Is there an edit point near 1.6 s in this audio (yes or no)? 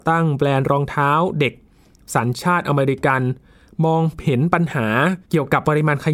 no